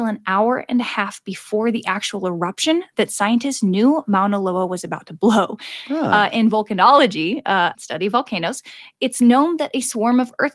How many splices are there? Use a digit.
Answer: 1